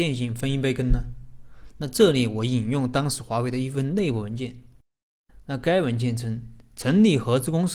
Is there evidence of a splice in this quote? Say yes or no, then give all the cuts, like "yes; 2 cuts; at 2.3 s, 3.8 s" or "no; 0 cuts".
no; 0 cuts